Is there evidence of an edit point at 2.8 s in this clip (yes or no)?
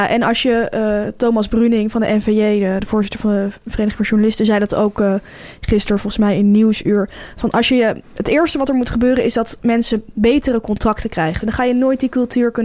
no